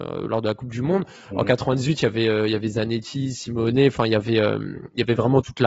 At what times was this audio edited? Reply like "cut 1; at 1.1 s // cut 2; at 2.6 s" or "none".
none